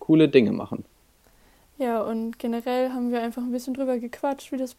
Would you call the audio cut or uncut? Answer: uncut